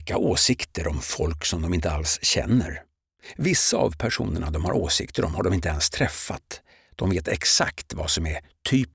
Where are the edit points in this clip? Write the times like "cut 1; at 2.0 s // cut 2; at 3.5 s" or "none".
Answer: none